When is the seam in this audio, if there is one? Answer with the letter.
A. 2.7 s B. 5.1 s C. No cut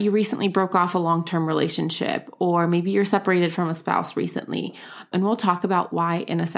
B